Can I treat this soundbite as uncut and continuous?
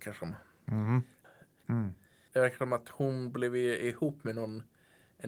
no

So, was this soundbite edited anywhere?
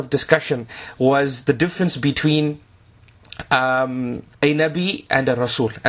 yes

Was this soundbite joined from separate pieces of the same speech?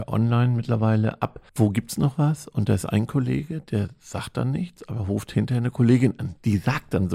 yes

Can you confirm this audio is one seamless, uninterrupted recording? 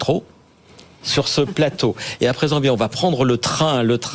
no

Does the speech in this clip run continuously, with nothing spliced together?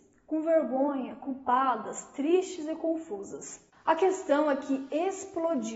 yes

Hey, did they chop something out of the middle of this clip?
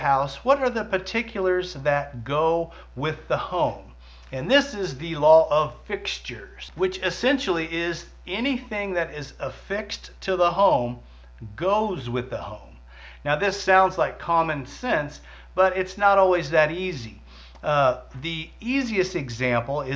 no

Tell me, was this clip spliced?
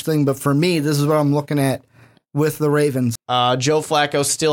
yes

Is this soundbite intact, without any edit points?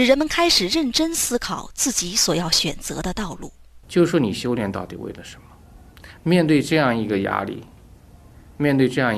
no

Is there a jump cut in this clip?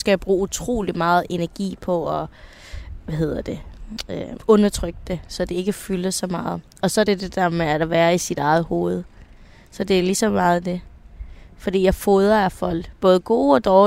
no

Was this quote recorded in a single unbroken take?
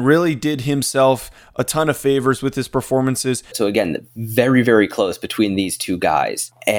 no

